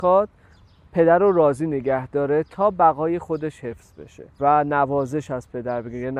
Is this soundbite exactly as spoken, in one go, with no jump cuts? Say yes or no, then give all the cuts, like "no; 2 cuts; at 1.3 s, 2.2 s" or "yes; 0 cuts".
no; 1 cut; at 4.3 s